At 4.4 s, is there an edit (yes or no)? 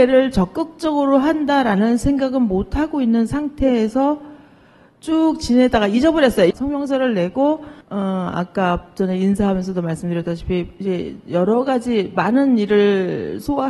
no